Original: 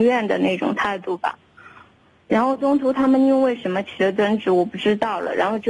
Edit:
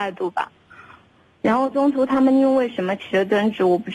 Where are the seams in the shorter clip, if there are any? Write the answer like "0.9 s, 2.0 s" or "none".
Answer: none